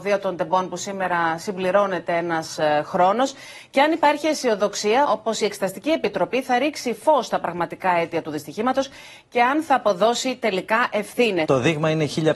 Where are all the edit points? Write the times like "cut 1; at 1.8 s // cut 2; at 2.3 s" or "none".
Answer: cut 1; at 5.0 s // cut 2; at 11.4 s